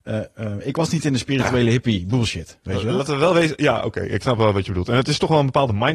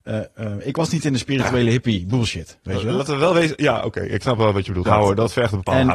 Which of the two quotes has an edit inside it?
second; 1 cut; at 4.9 s

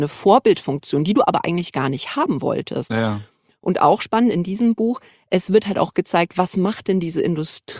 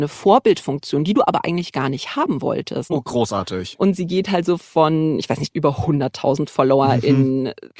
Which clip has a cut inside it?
second; 2 cuts; at 2.9 s, 5.5 s

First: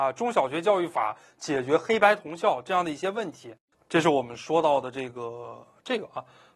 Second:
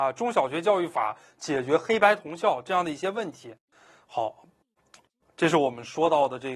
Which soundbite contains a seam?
first; 1 cut; at 3.7 s

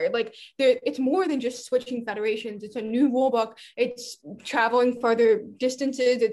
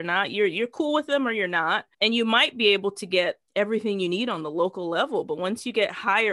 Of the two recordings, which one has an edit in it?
second; 2 cuts; at 1.9 s, 3.5 s

